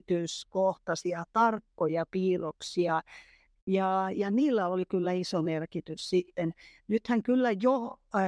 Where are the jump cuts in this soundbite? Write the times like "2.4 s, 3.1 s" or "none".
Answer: 3.6 s